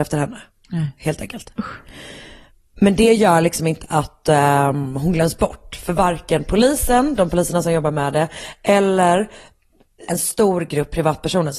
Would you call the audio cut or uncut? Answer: cut